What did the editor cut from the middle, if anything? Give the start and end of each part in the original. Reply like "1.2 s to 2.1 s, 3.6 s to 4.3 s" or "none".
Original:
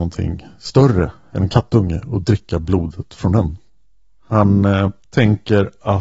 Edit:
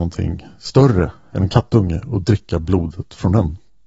none